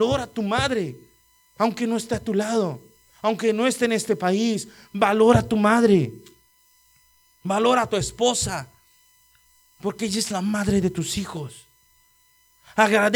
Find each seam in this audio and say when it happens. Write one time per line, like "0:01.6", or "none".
none

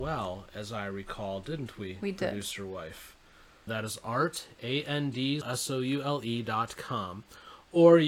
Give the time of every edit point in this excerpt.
0:03.7
0:05.4

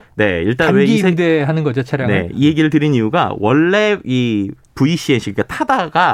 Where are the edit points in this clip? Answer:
none

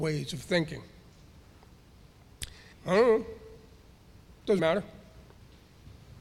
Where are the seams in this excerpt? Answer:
0:02.7
0:04.6

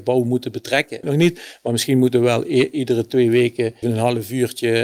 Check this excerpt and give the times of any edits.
0:01.0
0:03.8

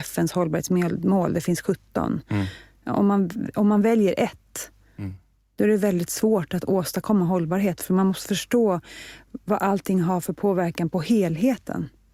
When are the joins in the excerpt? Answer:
none

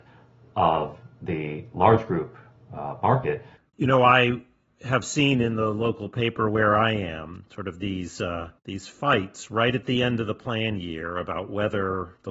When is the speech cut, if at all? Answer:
0:03.6
0:08.6

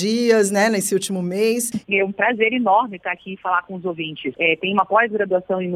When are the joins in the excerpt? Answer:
0:01.8
0:04.3

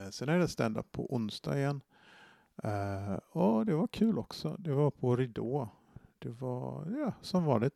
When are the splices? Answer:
none

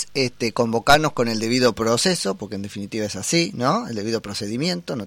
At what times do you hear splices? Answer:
none

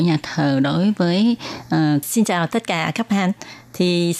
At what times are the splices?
0:02.0

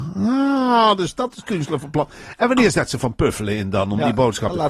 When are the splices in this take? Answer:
none

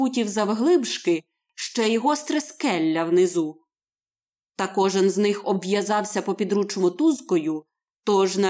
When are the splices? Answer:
none

